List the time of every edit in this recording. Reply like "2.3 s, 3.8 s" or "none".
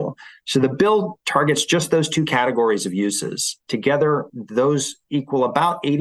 none